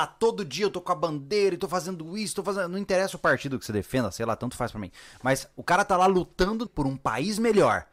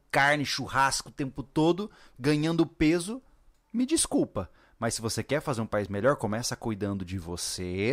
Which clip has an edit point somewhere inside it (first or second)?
first